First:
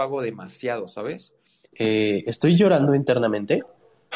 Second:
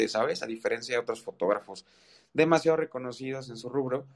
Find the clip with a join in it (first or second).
first